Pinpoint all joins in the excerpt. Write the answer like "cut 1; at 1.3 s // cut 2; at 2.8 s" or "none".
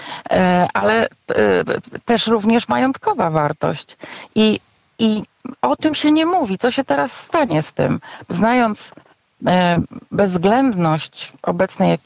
none